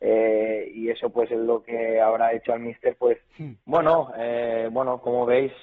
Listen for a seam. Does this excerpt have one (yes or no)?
yes